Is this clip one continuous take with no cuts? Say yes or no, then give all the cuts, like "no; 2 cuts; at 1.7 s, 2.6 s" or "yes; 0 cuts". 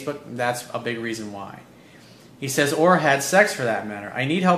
yes; 0 cuts